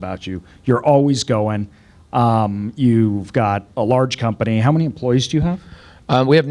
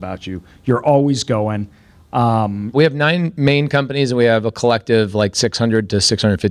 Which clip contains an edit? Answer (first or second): second